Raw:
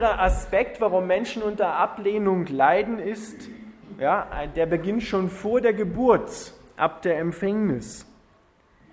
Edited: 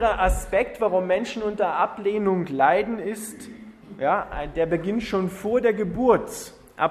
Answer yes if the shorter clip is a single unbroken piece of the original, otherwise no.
yes